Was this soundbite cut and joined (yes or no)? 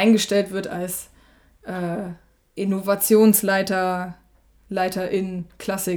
no